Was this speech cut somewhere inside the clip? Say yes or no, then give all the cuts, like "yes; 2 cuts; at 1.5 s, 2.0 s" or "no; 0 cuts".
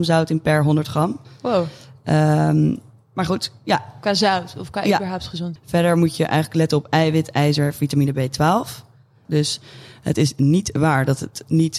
yes; 2 cuts; at 5.6 s, 9.2 s